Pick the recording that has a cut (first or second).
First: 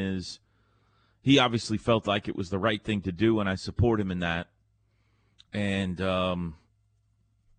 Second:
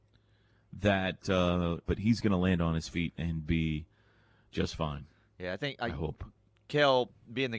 second